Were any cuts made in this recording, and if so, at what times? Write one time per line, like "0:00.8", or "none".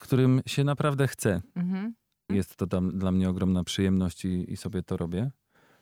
0:02.3